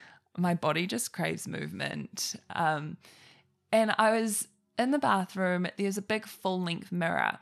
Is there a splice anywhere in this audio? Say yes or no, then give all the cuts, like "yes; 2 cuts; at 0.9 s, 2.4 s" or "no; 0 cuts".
no; 0 cuts